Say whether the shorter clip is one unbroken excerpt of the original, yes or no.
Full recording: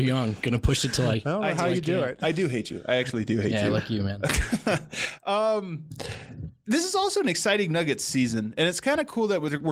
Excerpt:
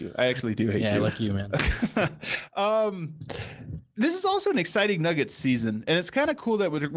yes